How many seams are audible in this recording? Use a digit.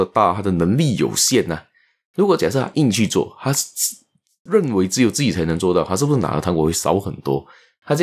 1